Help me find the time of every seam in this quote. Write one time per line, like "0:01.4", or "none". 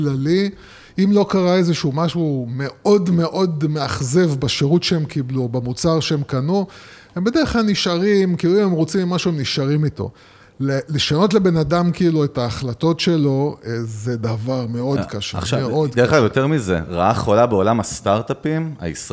none